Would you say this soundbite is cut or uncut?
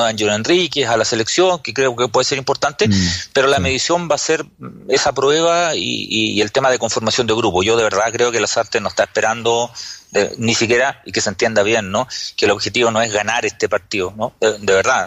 uncut